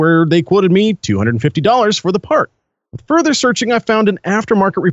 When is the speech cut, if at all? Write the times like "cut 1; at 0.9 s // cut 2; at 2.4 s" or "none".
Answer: cut 1; at 2.8 s

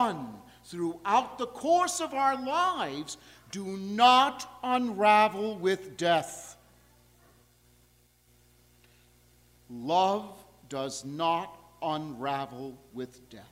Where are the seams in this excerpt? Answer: none

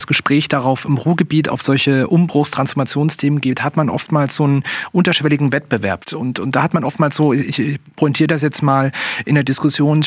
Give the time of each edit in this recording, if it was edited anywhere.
cut 1; at 6.1 s

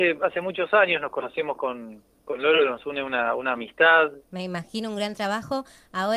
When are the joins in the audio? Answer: cut 1; at 4.2 s

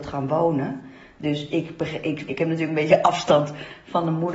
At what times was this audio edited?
cut 1; at 2.3 s

